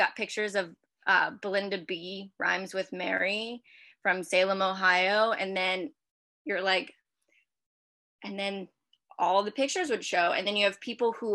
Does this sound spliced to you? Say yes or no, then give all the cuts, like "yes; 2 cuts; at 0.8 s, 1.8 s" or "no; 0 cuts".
no; 0 cuts